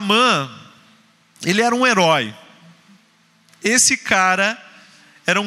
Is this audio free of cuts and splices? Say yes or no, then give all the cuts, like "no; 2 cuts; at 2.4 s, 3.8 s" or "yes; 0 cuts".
yes; 0 cuts